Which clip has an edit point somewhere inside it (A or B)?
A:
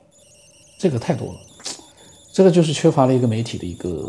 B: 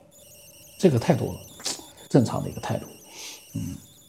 B